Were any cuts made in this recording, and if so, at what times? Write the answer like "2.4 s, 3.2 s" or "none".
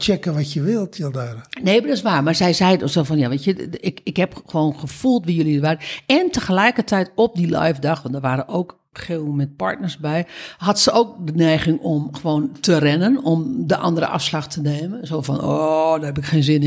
none